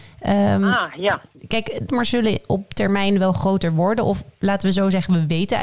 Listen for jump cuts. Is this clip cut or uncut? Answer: cut